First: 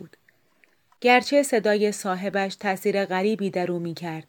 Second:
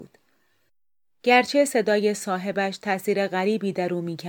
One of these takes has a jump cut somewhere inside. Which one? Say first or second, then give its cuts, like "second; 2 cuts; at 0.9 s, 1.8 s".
first; 1 cut; at 1.0 s